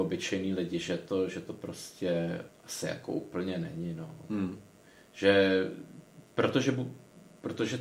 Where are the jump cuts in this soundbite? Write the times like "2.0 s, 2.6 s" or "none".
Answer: 2.5 s